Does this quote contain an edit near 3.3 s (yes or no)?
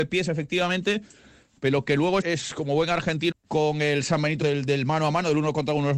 yes